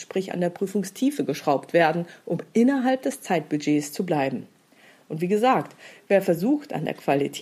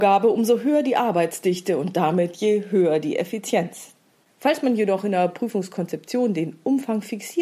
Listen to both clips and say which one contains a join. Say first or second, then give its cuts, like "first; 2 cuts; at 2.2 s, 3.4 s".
second; 1 cut; at 4.2 s